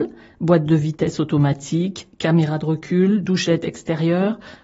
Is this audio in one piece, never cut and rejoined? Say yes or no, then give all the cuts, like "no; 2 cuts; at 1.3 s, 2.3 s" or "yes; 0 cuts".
yes; 0 cuts